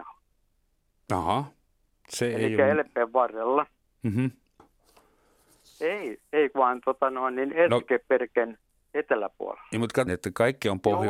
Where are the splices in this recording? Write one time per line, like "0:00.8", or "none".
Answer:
0:04.6
0:10.1